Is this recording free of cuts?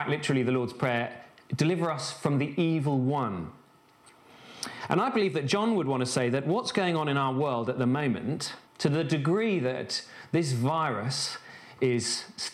no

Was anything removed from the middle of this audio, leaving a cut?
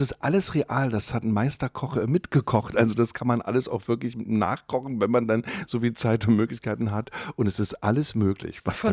no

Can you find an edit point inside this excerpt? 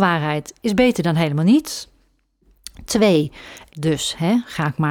yes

